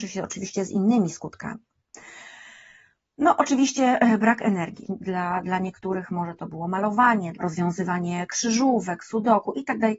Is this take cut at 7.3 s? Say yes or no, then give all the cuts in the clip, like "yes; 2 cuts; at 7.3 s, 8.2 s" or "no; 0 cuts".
yes; 2 cuts; at 4.8 s, 7.3 s